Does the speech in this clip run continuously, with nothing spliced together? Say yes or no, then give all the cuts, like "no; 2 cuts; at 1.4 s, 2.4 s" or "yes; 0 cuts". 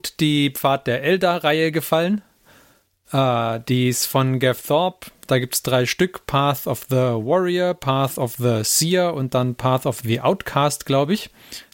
yes; 0 cuts